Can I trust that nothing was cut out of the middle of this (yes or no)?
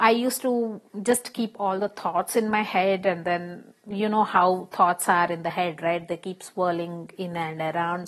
yes